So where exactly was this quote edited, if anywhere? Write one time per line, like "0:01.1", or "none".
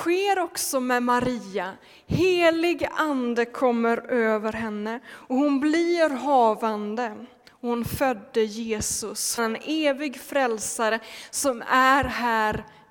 0:09.4

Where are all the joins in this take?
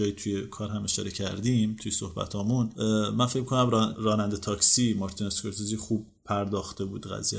0:03.9

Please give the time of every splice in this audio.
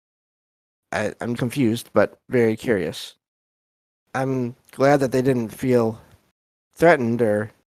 0:01.4
0:04.0

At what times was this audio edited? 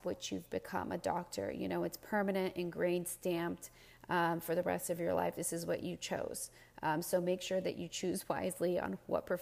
none

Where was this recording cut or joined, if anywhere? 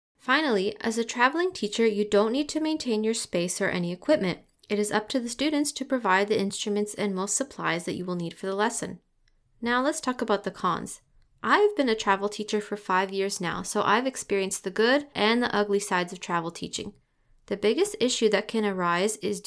0:15.1

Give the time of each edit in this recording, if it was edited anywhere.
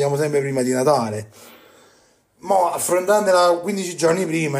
none

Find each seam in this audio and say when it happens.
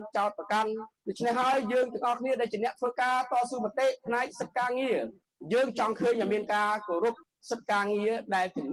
none

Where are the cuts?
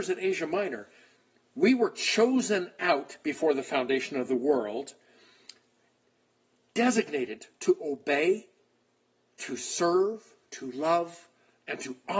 0:07.5
0:10.4

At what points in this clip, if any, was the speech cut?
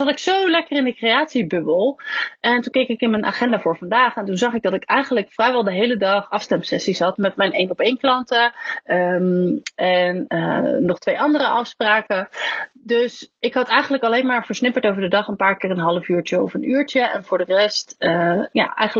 none

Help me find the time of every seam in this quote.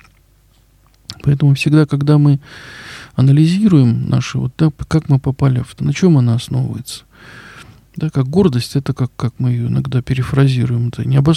0:05.8

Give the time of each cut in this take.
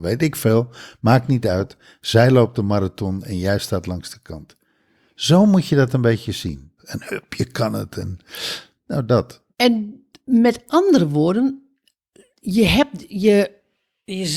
0:06.8
0:09.5

